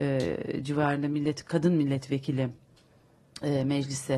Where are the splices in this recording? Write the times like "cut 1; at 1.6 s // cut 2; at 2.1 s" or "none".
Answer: none